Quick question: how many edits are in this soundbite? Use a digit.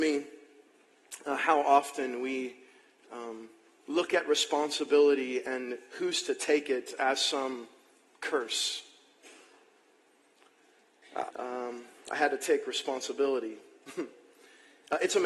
1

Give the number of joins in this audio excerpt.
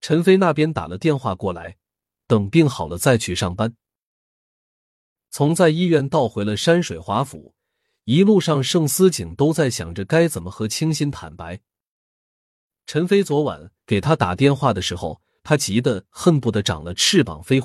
1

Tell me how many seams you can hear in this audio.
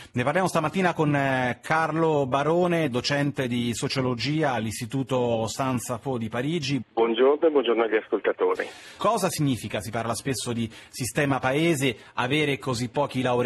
2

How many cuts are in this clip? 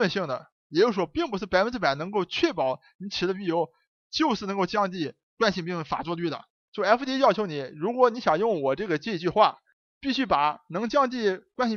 1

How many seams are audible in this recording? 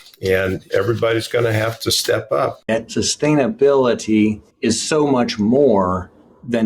2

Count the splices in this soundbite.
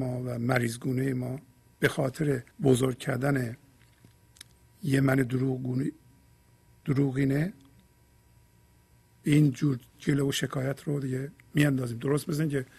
1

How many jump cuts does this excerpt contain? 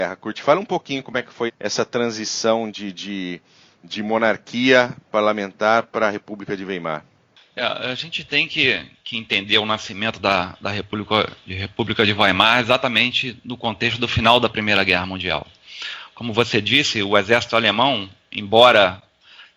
1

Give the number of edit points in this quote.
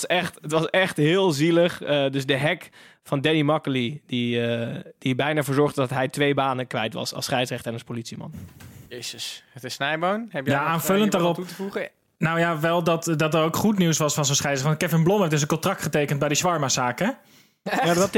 1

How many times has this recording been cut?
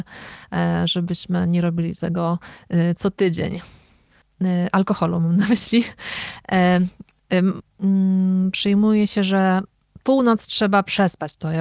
2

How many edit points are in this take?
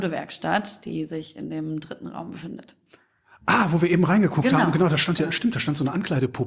0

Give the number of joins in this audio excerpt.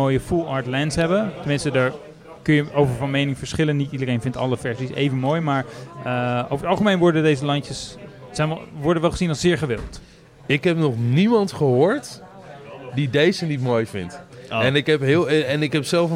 0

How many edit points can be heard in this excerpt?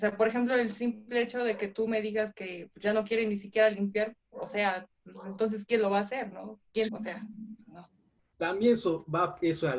2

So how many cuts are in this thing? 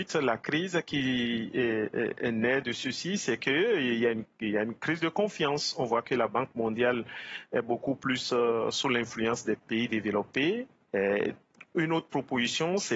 1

